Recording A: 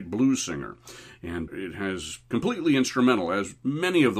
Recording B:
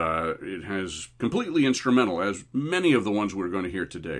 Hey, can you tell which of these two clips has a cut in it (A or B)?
A